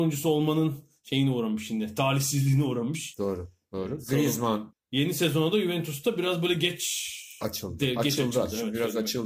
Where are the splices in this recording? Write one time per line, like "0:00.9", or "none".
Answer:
0:04.7